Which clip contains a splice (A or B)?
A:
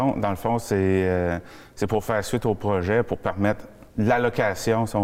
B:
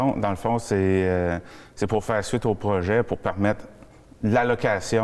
A